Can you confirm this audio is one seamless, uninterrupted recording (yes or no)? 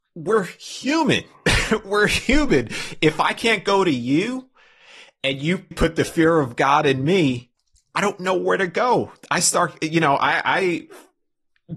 no